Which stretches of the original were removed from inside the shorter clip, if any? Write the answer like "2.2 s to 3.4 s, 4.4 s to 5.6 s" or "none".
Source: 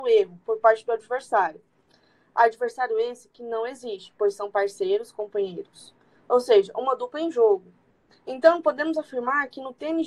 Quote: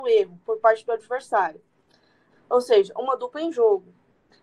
2.3 s to 6.1 s